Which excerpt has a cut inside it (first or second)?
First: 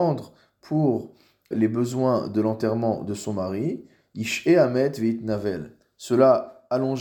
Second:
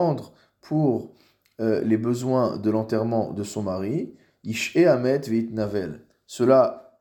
first